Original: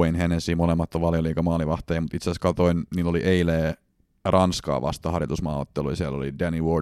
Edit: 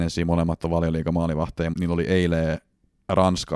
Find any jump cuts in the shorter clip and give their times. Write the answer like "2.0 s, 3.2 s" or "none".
1.7 s